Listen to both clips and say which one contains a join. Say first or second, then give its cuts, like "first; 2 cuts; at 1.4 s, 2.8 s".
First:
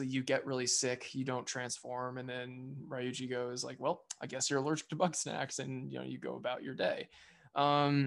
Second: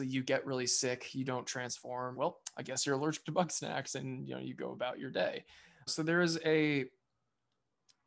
second; 2 cuts; at 2.1 s, 5.9 s